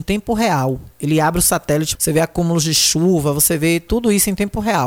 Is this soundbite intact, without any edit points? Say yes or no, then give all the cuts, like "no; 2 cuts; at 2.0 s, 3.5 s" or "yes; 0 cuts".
no; 1 cut; at 1.9 s